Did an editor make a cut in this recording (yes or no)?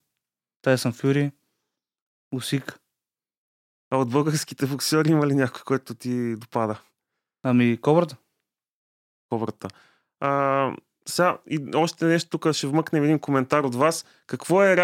no